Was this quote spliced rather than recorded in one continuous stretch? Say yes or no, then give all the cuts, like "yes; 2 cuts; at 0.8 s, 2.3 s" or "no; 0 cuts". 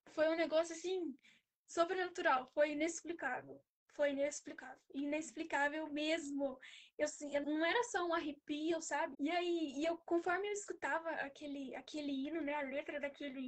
yes; 2 cuts; at 7.4 s, 9.1 s